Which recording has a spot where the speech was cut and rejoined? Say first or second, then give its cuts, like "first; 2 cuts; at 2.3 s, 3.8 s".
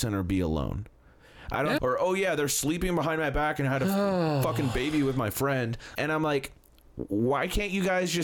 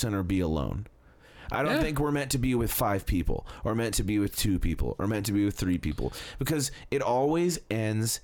first; 2 cuts; at 1.8 s, 5.9 s